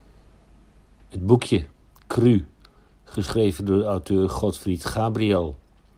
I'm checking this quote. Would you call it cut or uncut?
uncut